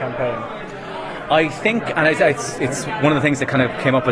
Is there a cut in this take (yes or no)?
no